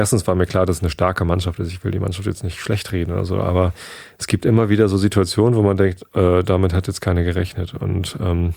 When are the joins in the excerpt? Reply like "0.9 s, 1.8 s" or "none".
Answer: none